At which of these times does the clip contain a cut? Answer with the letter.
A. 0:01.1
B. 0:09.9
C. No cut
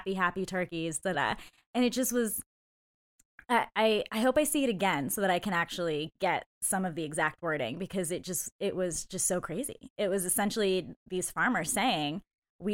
A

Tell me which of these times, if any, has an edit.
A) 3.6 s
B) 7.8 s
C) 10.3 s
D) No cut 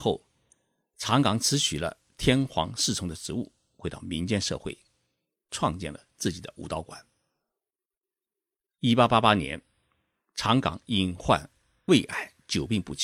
D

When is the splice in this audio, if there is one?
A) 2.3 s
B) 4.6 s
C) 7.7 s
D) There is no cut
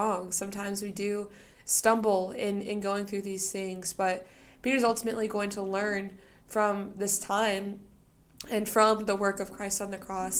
D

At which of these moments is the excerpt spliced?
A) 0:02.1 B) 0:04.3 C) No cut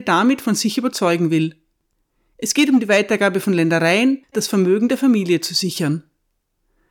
B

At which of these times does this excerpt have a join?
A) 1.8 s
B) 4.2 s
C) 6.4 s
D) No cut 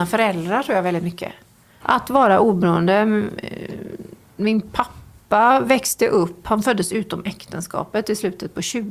A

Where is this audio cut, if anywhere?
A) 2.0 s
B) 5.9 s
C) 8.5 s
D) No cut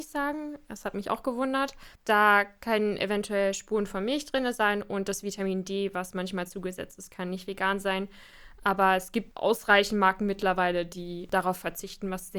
A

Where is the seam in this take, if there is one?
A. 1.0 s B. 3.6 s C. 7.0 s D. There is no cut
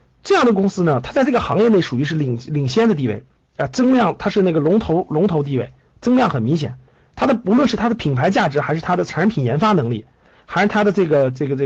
D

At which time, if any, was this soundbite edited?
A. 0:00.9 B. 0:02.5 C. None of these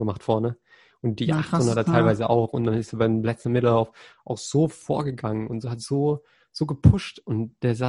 C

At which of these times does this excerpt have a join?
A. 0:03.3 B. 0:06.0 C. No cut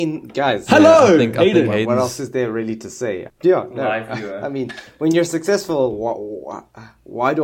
A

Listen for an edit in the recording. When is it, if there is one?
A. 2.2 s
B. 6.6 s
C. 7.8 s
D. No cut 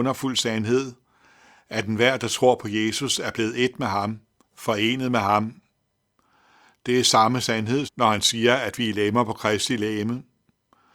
C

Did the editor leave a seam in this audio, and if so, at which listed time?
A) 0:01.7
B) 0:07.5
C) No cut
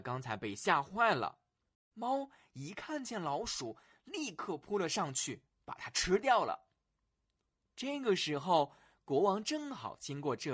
A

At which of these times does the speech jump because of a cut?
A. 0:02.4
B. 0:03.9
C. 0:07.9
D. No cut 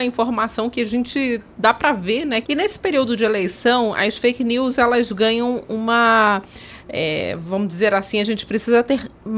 A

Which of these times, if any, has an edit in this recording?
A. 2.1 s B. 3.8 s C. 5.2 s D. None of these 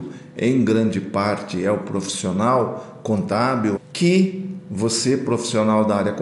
B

